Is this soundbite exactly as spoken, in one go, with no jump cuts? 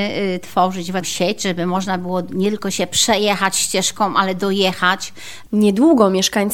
no; 1 cut; at 5.5 s

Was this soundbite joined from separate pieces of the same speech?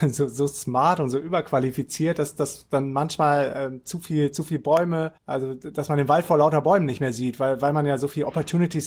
yes; 1 cut; at 5.2 s

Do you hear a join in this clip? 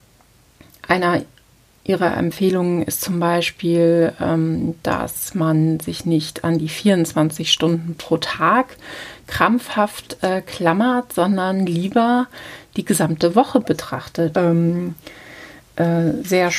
yes; 1 cut; at 14.3 s

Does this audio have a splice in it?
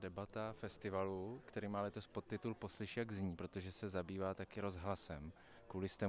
no; 0 cuts

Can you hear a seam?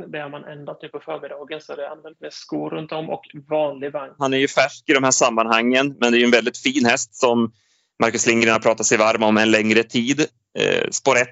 yes; 1 cut; at 4.2 s

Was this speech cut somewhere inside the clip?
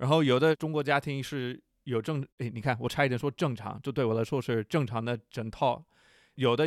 yes; 1 cut; at 2.3 s

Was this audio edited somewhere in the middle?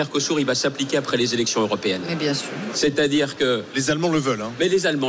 no; 0 cuts

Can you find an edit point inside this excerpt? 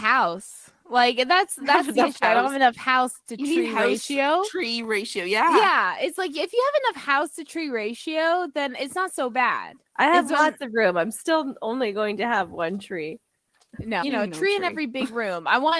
yes; 2 cuts; at 9.8 s, 14.0 s

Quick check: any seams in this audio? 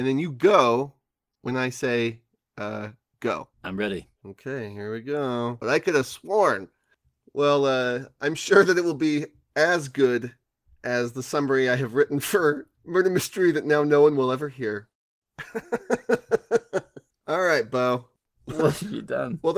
yes; 2 cuts; at 5.6 s, 18.3 s

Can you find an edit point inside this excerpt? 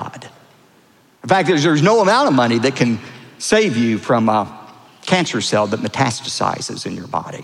no; 0 cuts

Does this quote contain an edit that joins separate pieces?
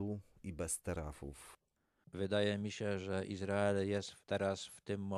yes; 1 cut; at 2.0 s

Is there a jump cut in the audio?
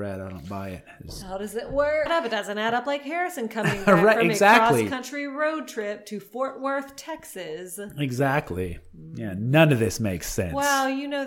yes; 1 cut; at 2.1 s

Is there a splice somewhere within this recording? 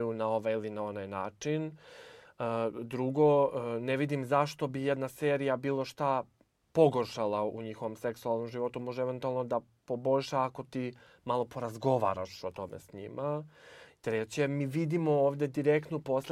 no; 0 cuts

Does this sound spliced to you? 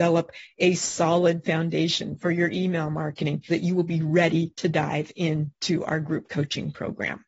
yes; 1 cut; at 3.5 s

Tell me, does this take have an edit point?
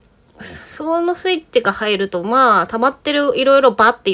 no; 0 cuts

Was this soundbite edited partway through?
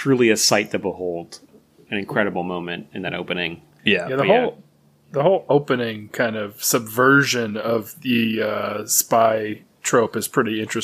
no; 0 cuts

